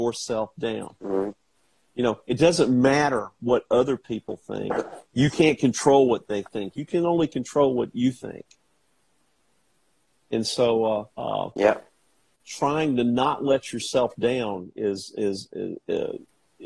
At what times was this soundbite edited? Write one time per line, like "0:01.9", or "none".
0:11.1

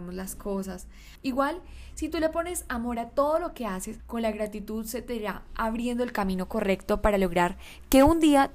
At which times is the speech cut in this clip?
0:01.2
0:04.0

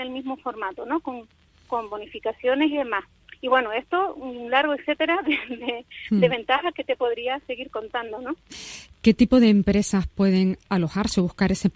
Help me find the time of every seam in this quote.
none

